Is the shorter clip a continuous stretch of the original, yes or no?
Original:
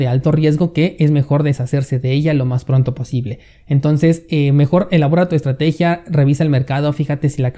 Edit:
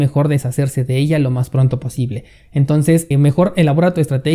no